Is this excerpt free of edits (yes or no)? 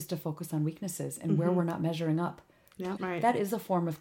no